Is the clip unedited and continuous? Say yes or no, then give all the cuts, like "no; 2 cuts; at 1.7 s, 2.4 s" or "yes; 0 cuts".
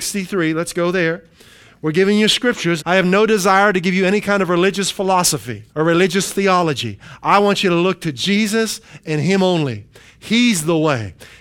no; 2 cuts; at 2.8 s, 5.7 s